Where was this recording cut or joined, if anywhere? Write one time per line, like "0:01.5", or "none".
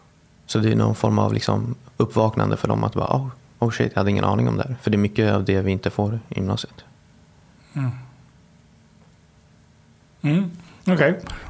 none